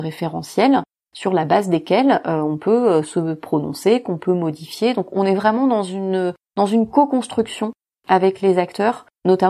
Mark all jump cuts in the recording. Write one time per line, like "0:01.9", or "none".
none